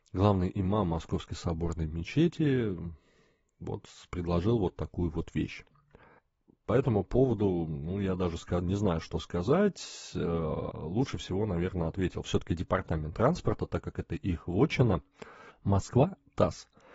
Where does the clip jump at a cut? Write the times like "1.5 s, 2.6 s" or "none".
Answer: none

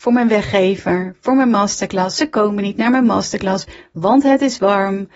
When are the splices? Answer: none

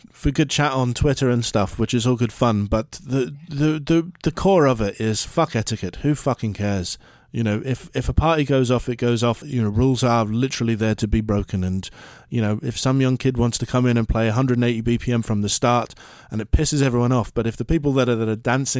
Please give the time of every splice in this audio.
9.4 s

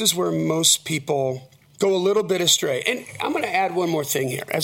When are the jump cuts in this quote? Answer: none

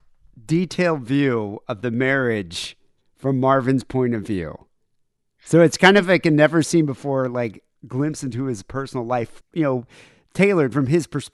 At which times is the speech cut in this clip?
9.4 s

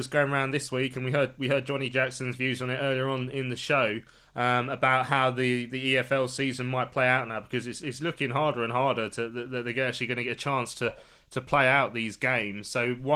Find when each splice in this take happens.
none

